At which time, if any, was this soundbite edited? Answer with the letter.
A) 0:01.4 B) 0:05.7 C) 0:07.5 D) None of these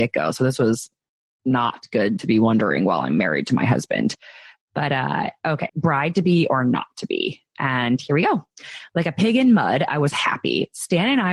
B